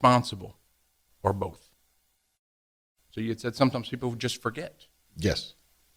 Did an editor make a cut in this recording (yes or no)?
no